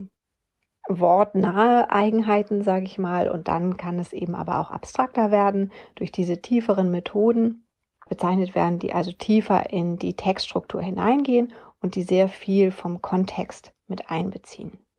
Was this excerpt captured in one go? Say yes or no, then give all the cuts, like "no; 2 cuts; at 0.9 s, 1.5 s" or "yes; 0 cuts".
no; 1 cut; at 8.1 s